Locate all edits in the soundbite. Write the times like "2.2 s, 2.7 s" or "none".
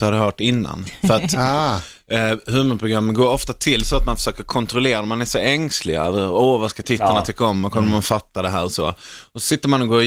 none